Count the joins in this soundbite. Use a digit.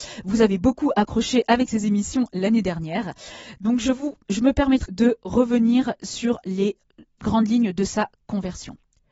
1